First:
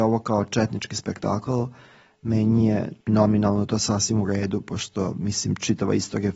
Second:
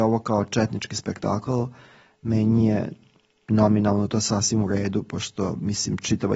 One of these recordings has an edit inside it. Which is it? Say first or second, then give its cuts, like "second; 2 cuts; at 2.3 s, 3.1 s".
first; 1 cut; at 3.0 s